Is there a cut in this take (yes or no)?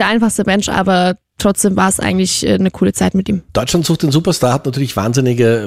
no